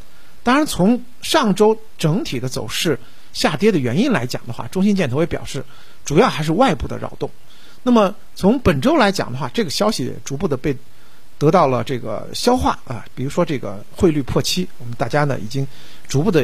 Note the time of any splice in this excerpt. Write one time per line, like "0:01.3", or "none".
0:07.8